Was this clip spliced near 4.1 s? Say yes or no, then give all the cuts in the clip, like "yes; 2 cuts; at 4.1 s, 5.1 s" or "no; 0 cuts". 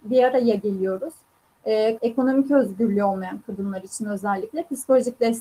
no; 1 cut; at 2.0 s